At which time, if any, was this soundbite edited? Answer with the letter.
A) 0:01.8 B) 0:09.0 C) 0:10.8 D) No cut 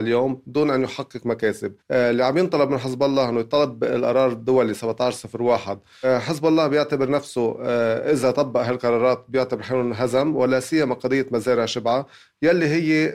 A